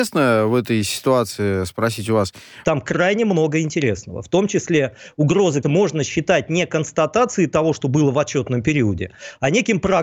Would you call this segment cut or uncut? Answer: cut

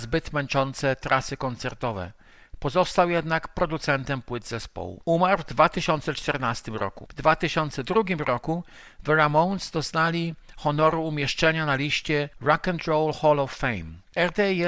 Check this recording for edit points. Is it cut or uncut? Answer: uncut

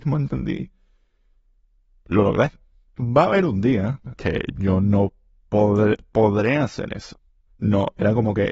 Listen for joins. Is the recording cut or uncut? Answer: cut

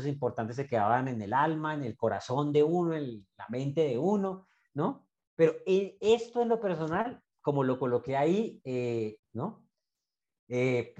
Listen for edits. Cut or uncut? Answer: cut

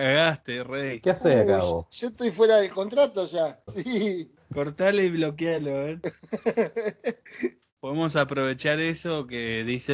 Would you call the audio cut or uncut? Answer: cut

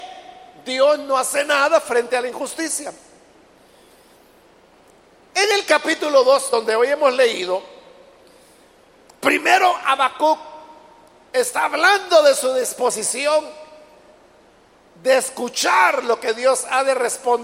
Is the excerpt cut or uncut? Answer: uncut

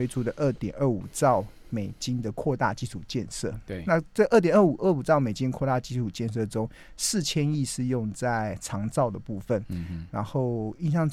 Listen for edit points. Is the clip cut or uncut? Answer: uncut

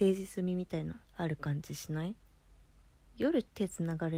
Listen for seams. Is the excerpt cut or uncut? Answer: cut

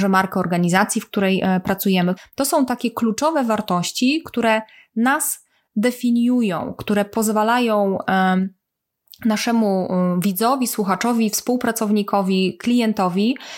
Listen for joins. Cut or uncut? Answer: cut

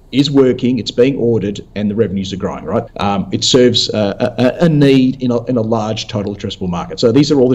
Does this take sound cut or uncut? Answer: cut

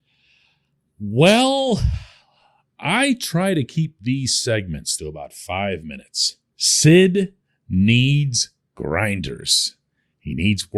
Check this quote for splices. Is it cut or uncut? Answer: cut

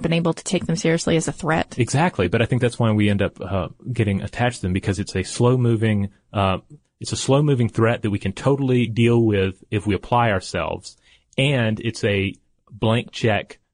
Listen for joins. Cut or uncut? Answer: uncut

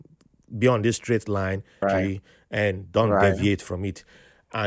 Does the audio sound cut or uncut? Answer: cut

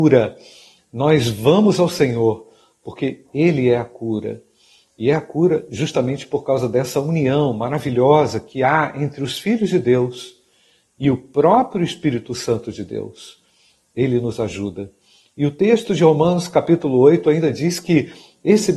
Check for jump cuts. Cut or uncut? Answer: uncut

